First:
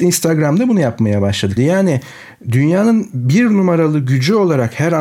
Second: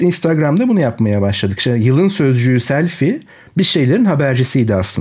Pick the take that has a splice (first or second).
first